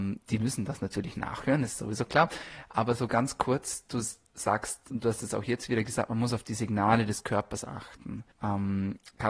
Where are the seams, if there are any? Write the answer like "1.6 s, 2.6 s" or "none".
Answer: 8.3 s